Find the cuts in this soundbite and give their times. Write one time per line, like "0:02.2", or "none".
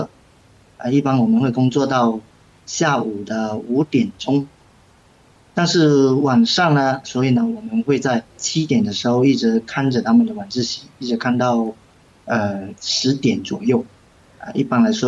0:07.0
0:08.3